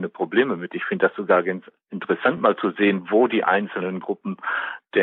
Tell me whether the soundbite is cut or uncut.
uncut